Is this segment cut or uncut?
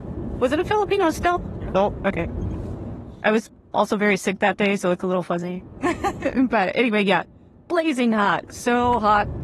uncut